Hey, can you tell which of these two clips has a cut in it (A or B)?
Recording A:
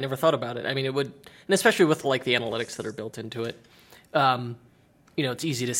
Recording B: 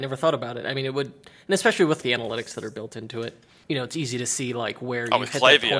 B